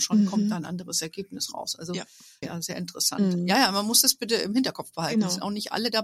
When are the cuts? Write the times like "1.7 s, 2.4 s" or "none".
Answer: 2.4 s